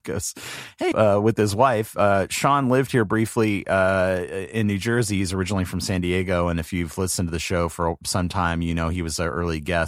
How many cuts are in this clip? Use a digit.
1